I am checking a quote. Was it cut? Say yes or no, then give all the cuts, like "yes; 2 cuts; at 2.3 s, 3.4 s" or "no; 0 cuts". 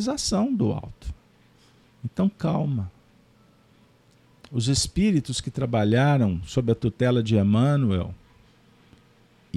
yes; 1 cut; at 1.9 s